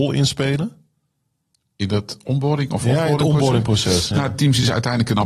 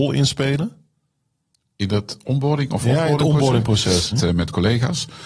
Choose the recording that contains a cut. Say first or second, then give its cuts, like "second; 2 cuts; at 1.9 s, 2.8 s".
second; 1 cut; at 4.1 s